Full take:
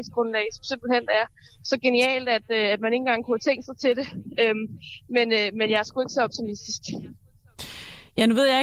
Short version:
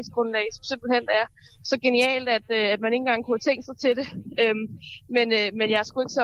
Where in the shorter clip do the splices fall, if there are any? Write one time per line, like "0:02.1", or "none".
none

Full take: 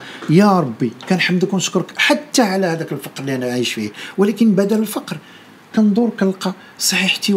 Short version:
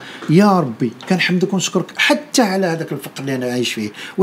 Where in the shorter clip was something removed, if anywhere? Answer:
none

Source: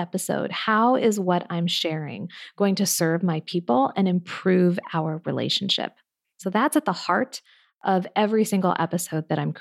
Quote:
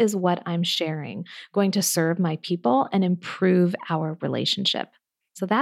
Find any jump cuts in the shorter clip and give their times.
none

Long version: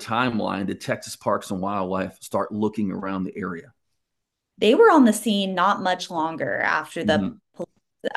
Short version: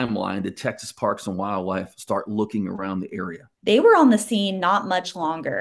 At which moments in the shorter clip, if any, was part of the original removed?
0:03.5

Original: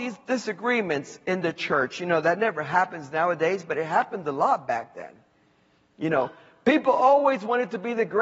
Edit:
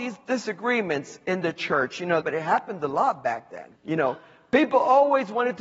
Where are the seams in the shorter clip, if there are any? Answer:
0:02.2
0:03.8

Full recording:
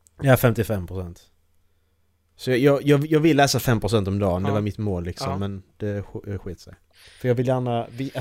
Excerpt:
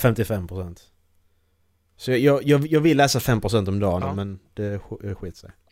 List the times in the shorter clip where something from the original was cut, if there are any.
0:04.0

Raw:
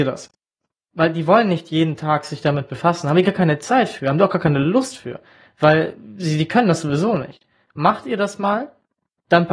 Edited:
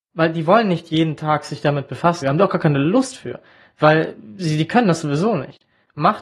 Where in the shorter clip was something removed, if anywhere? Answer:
0:02.2

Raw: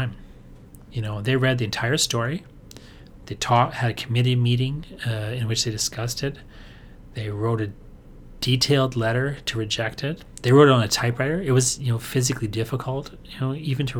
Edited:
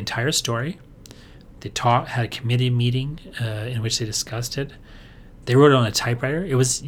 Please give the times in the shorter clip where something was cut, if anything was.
0:05.4

